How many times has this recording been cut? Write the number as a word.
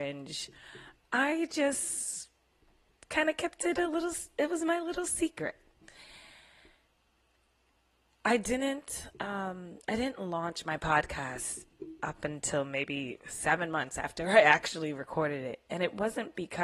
one